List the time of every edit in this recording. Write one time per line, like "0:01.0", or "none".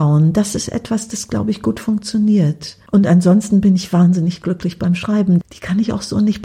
0:02.9
0:05.4